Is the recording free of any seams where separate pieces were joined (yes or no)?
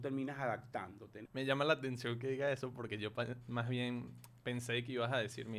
no